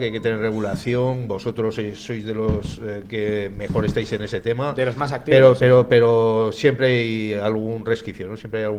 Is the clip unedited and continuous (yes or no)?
yes